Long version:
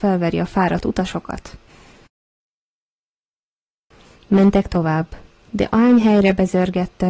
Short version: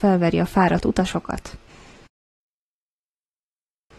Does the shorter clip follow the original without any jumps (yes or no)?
yes